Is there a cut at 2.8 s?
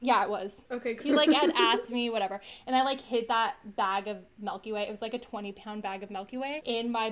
no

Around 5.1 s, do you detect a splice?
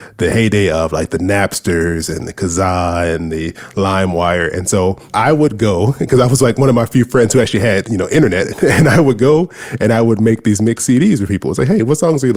yes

